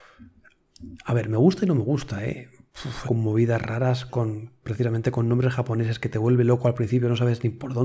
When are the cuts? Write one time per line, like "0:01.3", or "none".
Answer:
0:03.0
0:04.1